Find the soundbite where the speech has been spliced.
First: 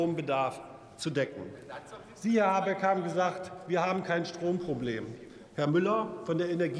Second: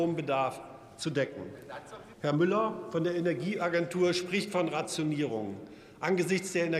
second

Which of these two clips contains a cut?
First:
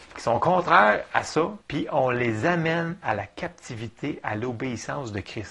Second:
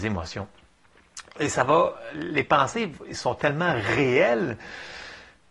first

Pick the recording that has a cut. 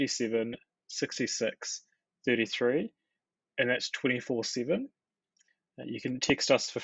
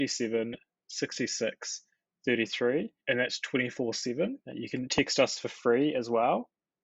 second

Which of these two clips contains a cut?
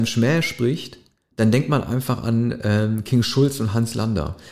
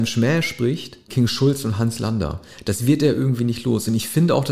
second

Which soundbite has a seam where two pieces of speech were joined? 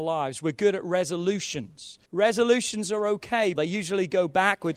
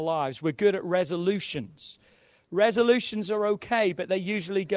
first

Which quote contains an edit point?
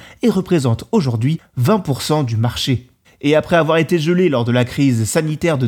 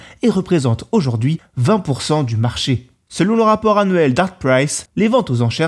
first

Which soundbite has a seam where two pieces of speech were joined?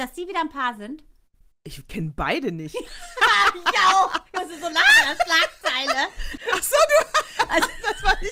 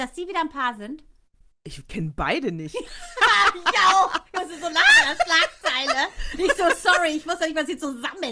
first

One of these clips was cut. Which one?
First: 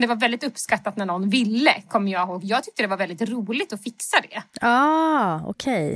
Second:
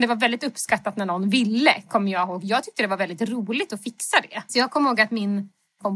second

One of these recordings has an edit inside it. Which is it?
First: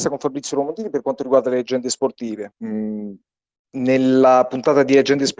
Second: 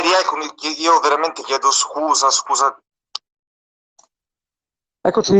first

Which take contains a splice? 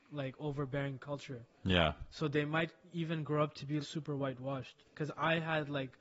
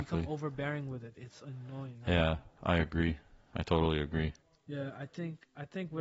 first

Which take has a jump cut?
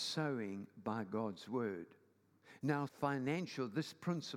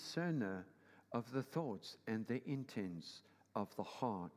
first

